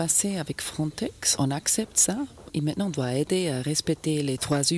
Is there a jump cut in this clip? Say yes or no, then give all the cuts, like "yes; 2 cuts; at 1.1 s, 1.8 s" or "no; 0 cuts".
no; 0 cuts